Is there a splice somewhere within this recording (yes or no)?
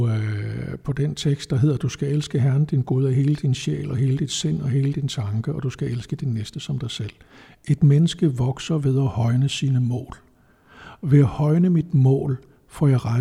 no